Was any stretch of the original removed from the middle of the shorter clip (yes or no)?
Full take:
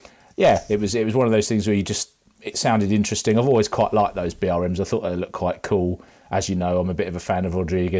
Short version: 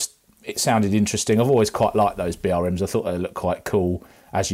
no